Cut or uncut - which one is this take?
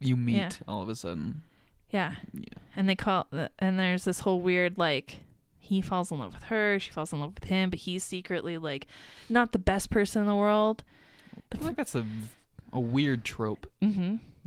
cut